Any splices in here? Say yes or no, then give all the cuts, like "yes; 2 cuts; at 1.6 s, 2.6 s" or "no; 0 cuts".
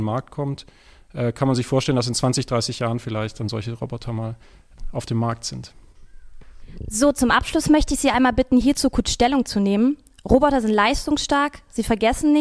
no; 0 cuts